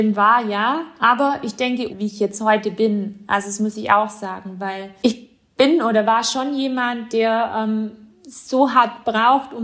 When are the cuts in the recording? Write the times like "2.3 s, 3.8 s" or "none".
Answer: 1.9 s